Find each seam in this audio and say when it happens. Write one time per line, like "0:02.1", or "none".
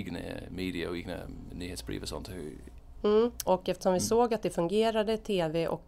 0:03.5